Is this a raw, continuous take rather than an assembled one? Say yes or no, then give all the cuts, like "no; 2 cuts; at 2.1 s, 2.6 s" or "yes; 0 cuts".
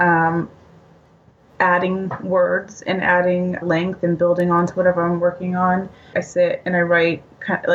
no; 2 cuts; at 3.6 s, 6.1 s